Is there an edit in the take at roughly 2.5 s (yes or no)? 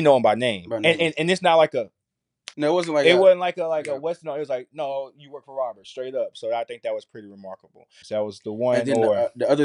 yes